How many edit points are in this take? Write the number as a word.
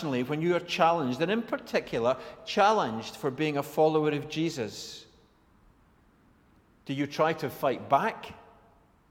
zero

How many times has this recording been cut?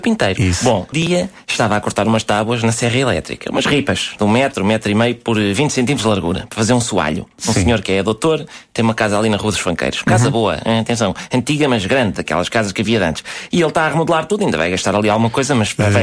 one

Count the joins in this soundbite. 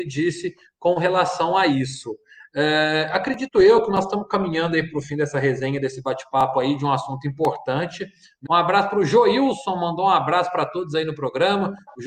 one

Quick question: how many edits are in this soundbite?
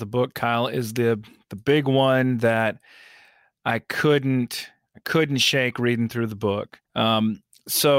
one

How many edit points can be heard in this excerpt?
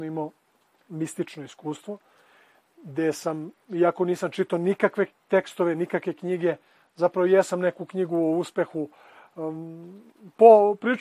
zero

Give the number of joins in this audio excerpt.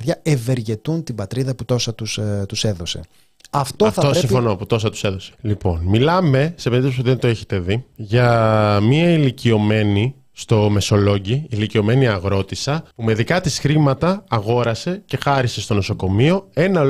three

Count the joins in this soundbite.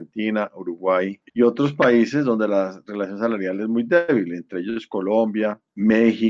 one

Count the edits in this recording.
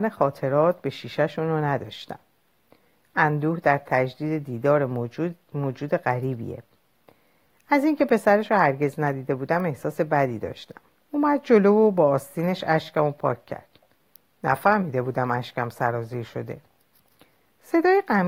one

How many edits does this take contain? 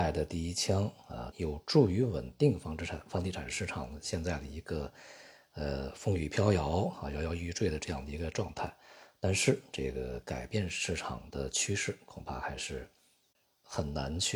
one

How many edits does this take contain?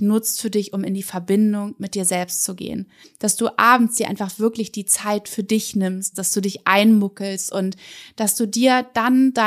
two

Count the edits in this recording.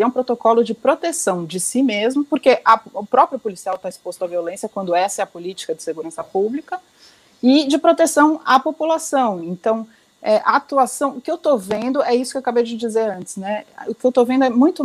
zero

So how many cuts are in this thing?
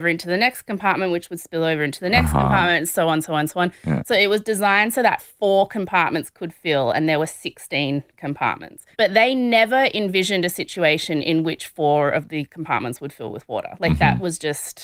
one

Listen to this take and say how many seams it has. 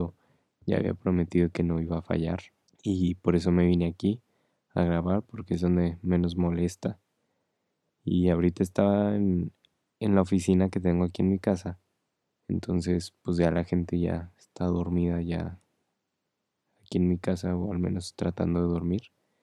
two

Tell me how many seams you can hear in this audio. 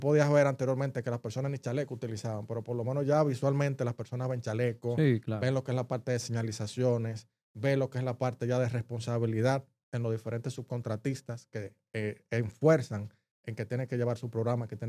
zero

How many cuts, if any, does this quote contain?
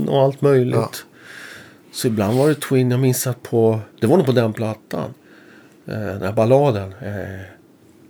one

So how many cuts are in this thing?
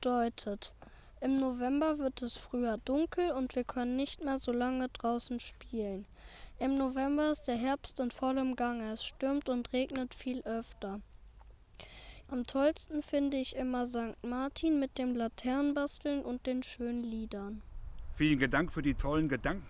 one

